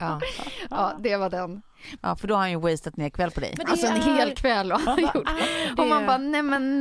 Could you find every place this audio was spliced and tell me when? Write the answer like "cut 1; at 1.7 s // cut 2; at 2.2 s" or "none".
cut 1; at 2.0 s